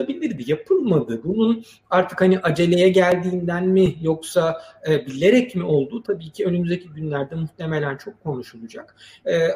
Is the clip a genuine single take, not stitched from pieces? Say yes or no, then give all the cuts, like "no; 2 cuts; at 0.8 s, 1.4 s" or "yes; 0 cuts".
yes; 0 cuts